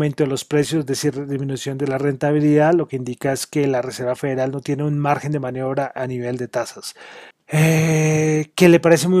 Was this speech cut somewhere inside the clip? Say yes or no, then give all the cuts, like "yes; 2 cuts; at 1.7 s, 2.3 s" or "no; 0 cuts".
yes; 1 cut; at 7.3 s